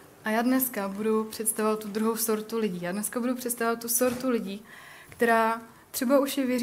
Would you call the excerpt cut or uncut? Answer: uncut